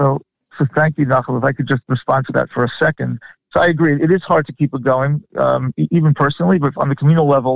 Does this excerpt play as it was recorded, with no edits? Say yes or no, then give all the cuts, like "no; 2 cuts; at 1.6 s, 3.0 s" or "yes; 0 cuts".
yes; 0 cuts